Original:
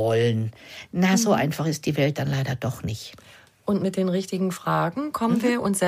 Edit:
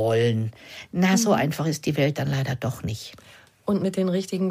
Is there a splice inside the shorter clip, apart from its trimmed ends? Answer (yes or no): no